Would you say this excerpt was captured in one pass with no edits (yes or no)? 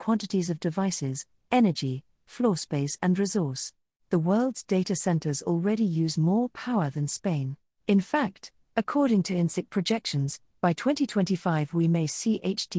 no